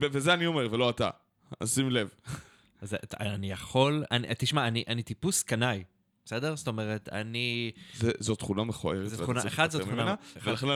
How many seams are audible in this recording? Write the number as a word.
zero